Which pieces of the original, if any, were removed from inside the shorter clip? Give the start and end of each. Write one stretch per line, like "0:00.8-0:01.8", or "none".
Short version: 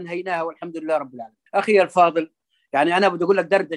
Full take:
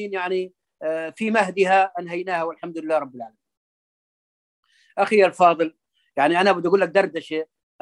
0:03.5-0:04.9